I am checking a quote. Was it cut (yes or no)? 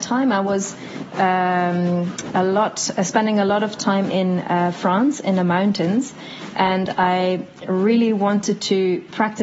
no